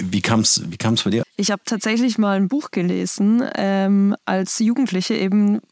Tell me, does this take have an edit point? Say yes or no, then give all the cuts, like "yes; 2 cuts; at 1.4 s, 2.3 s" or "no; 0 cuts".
yes; 1 cut; at 1.2 s